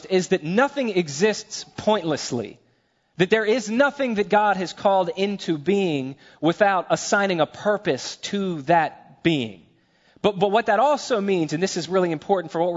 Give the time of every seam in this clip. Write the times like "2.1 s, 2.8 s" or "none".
none